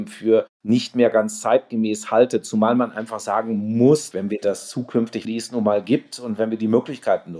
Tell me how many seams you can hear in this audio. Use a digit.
2